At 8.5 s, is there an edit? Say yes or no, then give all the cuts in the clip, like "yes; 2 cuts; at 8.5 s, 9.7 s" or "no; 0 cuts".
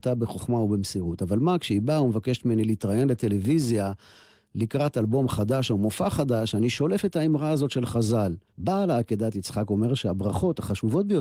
yes; 1 cut; at 8.5 s